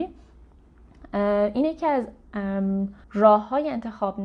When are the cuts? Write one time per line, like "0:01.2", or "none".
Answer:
0:03.0